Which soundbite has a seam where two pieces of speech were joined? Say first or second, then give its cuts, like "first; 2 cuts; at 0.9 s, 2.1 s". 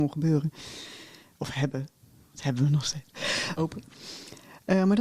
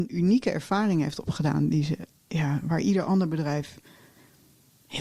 first; 1 cut; at 3.6 s